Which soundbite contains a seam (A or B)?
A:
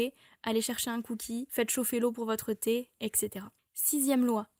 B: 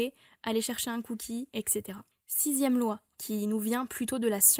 B